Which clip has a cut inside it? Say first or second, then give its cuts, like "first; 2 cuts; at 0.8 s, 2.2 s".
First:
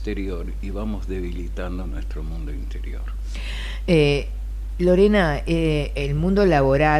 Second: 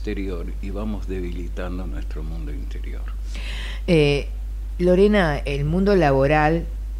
second; 1 cut; at 5.4 s